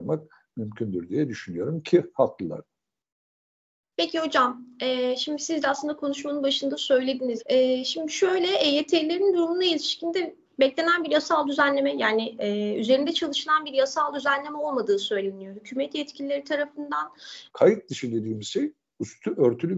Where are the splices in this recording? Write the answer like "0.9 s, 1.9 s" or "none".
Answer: 7.4 s, 17.5 s